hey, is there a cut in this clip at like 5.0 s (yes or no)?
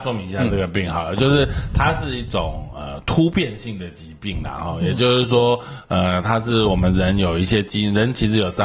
no